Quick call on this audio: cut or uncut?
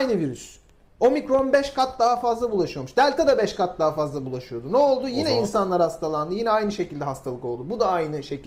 uncut